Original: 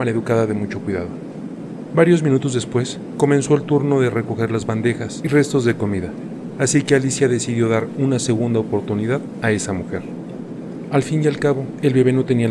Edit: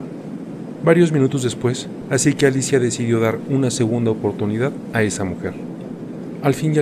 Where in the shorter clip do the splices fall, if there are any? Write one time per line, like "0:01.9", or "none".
0:02.0